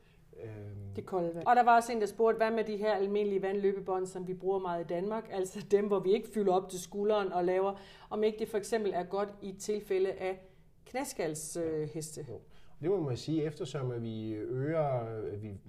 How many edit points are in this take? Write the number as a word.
one